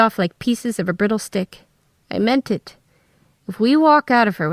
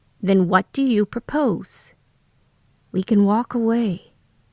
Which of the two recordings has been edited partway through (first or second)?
first